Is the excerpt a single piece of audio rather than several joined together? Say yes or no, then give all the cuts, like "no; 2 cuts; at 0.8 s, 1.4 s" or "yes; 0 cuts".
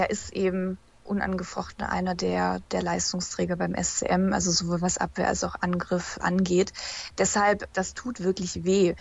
yes; 0 cuts